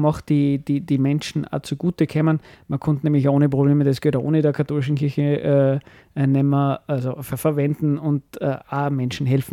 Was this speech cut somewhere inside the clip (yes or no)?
no